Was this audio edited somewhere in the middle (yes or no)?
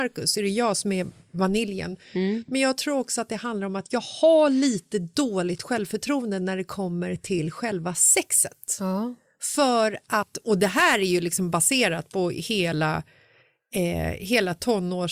no